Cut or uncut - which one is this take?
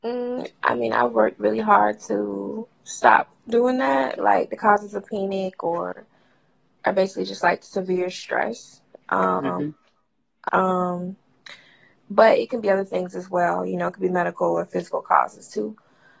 cut